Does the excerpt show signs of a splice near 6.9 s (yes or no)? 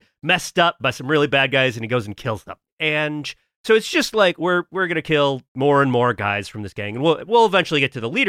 no